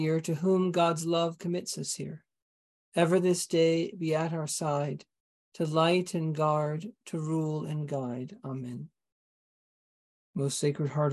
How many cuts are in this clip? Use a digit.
0